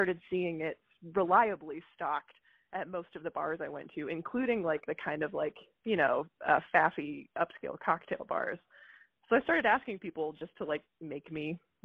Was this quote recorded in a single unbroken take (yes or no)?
yes